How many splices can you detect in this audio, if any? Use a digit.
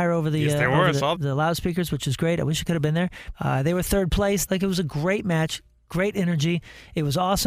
3